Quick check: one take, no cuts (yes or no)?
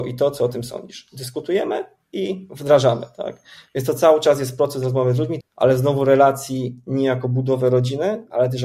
no